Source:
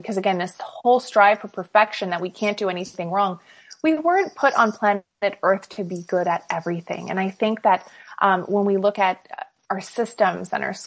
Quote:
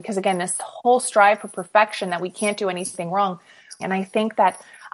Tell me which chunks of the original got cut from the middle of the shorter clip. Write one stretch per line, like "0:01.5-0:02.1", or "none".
0:03.8-0:07.1